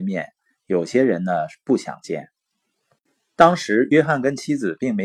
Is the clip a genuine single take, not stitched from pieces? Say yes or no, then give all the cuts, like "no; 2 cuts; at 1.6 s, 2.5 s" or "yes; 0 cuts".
yes; 0 cuts